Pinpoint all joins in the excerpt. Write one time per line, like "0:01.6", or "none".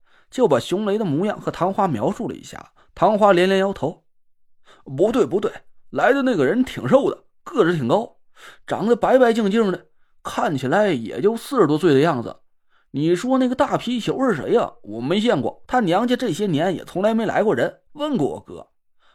0:15.7
0:17.9